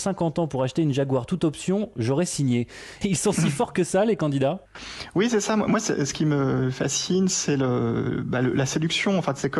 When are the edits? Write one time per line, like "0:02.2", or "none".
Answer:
none